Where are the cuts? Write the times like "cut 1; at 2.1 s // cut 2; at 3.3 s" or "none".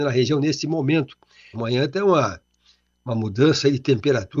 cut 1; at 1.5 s